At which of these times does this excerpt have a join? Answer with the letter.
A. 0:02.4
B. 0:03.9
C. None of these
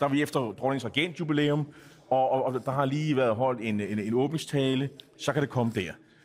C